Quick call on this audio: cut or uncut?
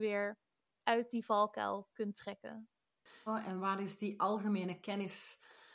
cut